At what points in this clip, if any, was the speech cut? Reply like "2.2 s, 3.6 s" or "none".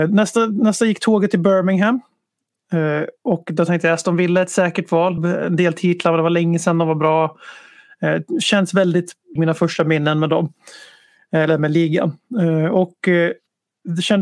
5.2 s, 9.4 s